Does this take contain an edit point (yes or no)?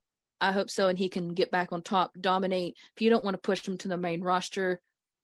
no